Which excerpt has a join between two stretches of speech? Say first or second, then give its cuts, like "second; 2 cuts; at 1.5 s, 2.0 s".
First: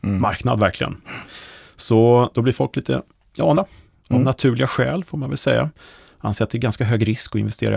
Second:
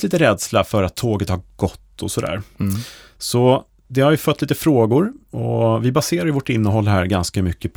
first; 1 cut; at 3.5 s